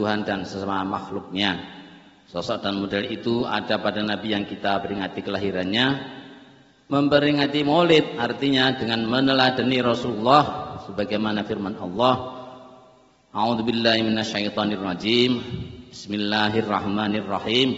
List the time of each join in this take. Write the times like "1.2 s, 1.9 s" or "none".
none